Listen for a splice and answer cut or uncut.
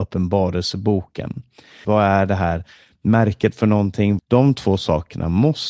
cut